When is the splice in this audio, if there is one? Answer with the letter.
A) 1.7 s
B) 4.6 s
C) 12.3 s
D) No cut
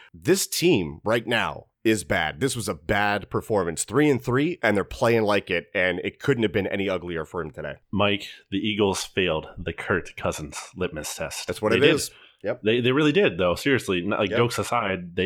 A